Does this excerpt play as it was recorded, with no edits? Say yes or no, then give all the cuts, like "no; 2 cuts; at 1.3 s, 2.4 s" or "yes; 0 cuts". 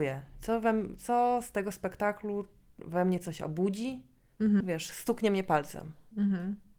no; 1 cut; at 4.6 s